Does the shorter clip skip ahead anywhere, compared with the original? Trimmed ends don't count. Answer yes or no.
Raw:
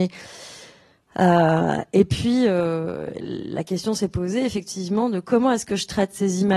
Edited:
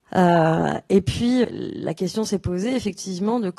yes